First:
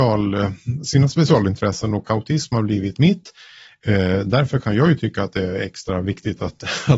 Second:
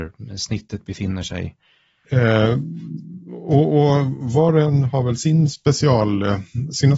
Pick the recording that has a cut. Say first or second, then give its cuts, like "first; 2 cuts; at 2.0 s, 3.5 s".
second; 1 cut; at 2.0 s